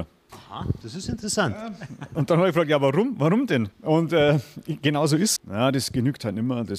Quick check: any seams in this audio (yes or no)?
yes